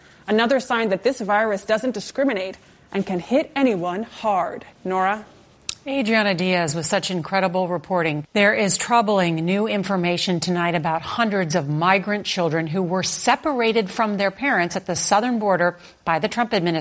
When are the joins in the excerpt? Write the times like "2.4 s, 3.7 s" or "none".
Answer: 4.7 s, 8.2 s